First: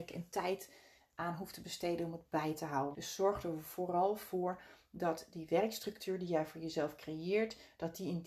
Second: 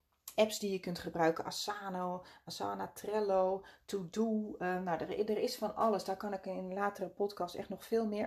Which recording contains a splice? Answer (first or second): first